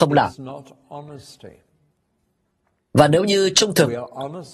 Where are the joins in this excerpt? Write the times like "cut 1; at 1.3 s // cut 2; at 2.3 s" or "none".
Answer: none